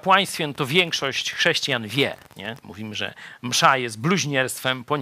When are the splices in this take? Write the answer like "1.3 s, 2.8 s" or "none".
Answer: 2.6 s